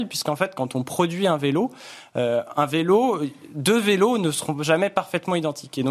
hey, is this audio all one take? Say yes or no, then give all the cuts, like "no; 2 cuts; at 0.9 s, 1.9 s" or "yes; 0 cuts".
yes; 0 cuts